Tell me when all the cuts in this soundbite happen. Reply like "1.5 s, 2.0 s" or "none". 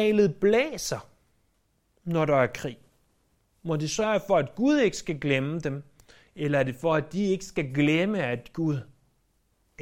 none